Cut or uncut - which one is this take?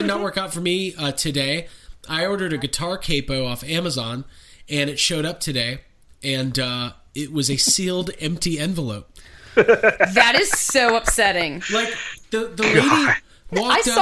uncut